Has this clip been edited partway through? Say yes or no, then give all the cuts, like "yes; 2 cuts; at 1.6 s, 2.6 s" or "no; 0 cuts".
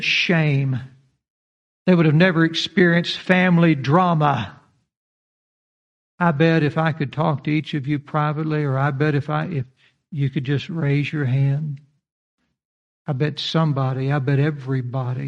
yes; 1 cut; at 6.1 s